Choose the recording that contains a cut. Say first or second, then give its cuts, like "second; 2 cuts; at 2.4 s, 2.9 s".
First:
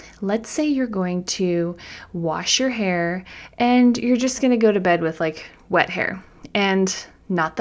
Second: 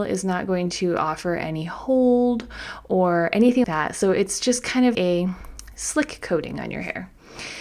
second; 2 cuts; at 3.6 s, 4.9 s